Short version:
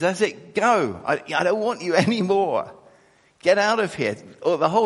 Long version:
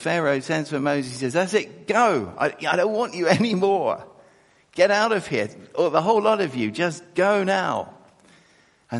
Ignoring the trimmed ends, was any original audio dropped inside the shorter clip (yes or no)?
no